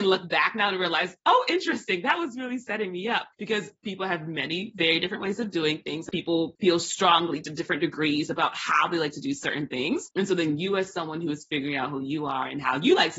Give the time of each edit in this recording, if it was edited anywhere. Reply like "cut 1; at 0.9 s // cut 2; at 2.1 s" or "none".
none